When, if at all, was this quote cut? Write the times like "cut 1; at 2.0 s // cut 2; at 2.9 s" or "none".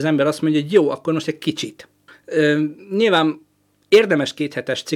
cut 1; at 2.1 s

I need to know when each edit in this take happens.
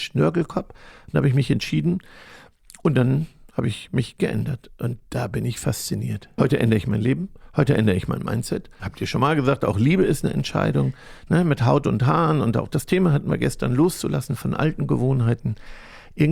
cut 1; at 6.4 s // cut 2; at 8.8 s

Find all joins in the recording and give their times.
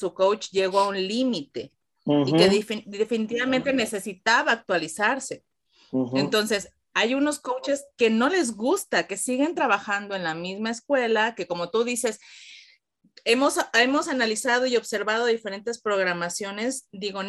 none

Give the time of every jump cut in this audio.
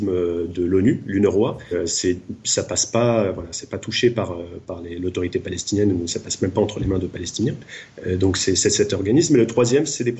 cut 1; at 1.7 s

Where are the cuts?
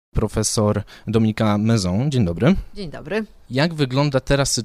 none

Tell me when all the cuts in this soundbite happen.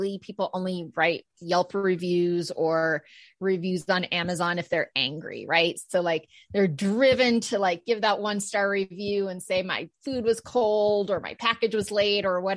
none

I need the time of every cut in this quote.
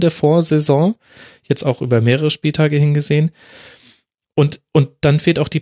none

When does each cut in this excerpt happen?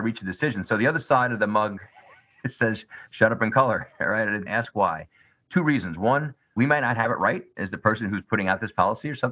cut 1; at 4.5 s

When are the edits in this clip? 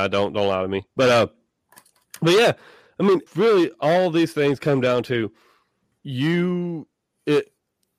cut 1; at 3.3 s // cut 2; at 5.9 s

